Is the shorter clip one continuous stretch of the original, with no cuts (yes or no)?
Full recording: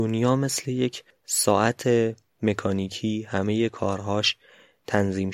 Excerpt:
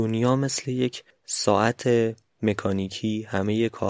yes